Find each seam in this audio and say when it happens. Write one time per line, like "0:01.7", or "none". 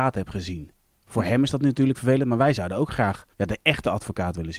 0:03.3